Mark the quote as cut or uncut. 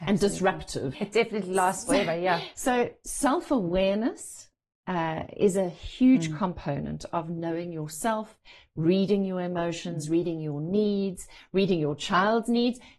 cut